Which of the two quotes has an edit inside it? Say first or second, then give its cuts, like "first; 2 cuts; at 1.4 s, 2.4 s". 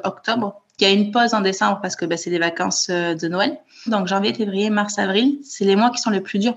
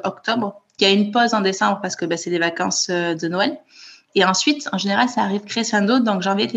first; 1 cut; at 3.9 s